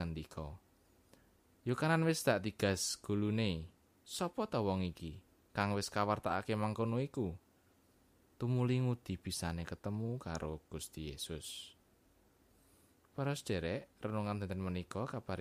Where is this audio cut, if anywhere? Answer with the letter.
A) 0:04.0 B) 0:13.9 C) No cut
C